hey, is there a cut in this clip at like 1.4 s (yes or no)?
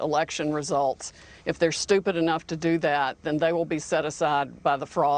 no